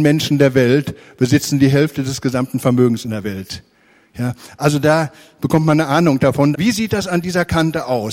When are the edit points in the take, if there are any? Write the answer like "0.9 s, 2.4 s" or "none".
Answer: 5.4 s, 6.5 s